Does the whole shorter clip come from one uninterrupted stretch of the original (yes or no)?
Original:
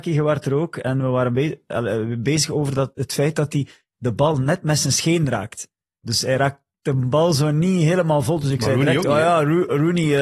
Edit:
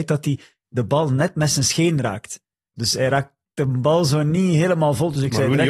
yes